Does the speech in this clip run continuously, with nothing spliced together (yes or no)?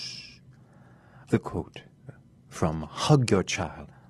no